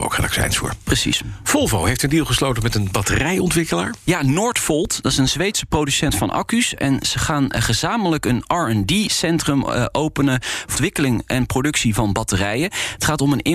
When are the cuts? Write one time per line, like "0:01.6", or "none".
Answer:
0:10.8